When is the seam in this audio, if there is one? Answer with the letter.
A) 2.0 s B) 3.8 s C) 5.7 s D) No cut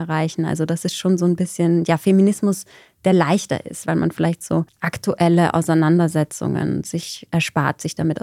B